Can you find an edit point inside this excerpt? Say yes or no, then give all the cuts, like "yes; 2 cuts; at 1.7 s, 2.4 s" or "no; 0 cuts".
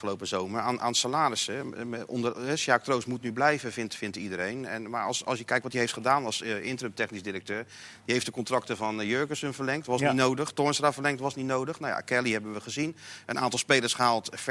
no; 0 cuts